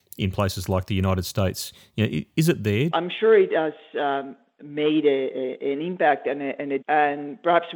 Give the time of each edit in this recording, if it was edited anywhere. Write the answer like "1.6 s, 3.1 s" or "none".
2.9 s, 6.8 s

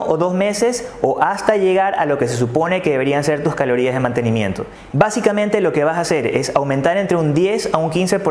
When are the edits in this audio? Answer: 4.9 s

